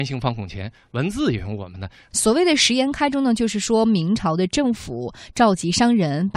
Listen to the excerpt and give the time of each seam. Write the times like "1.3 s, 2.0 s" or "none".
2.1 s